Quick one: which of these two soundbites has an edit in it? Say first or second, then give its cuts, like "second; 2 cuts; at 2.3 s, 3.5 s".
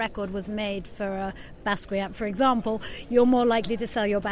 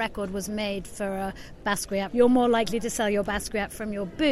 second; 1 cut; at 2.1 s